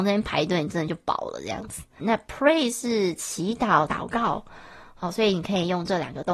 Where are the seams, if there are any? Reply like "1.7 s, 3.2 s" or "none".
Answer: 2.0 s, 3.9 s